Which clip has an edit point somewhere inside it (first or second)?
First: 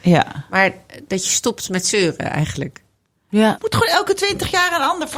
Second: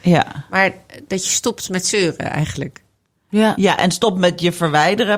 first